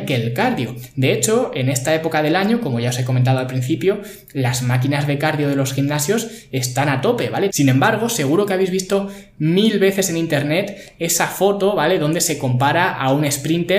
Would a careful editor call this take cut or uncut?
cut